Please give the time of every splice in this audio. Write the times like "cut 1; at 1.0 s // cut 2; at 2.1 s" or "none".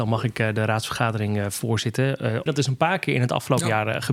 cut 1; at 2.5 s